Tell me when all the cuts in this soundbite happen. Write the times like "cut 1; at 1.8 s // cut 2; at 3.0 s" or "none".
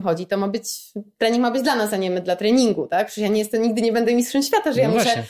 none